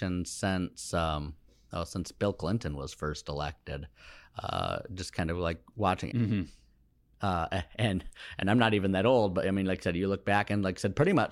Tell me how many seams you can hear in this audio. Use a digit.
1